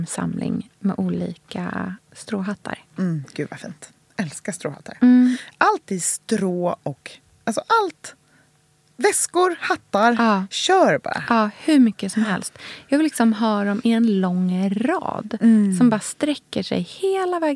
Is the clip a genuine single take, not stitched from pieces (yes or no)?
yes